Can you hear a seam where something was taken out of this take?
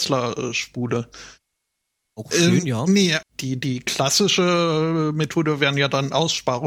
yes; 1 cut; at 3.2 s

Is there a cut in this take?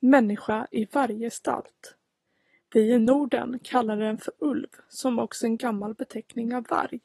no; 0 cuts

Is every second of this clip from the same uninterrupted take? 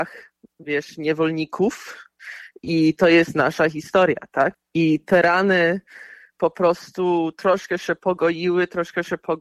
no; 1 cut; at 4.5 s

